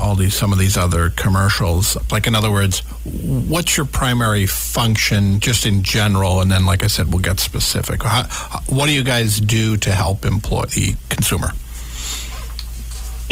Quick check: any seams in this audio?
yes; 1 cut; at 2.1 s

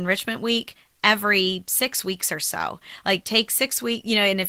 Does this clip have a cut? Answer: no; 0 cuts

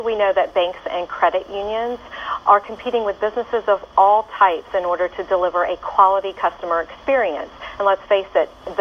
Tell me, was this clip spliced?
no; 0 cuts

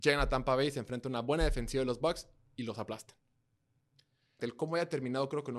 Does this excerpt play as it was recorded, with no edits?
no; 1 cut; at 4.4 s

